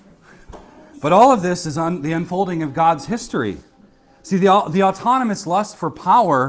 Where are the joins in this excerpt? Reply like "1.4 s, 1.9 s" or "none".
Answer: none